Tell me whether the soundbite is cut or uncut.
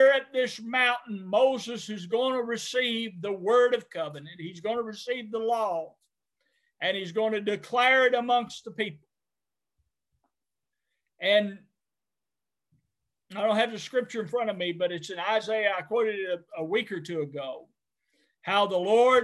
uncut